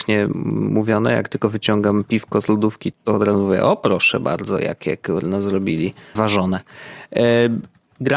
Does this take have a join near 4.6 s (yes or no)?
no